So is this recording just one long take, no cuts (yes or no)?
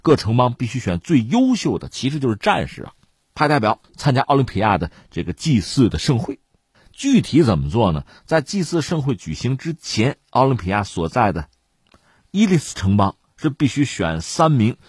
yes